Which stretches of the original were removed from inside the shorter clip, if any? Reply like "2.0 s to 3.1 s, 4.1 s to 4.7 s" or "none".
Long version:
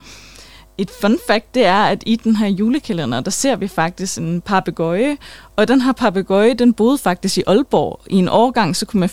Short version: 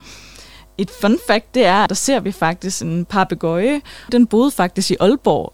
1.9 s to 3.2 s, 5.4 s to 6.6 s